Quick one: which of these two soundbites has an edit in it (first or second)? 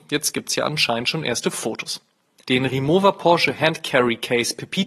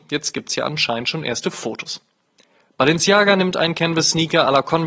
first